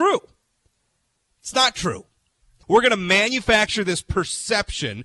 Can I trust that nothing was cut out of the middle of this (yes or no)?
no